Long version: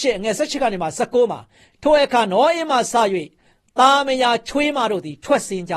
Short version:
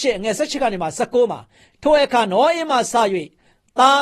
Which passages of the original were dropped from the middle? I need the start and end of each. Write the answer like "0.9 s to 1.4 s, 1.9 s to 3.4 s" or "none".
none